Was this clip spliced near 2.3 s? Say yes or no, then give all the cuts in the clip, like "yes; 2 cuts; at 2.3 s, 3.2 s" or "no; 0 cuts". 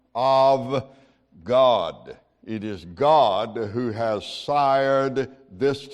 no; 0 cuts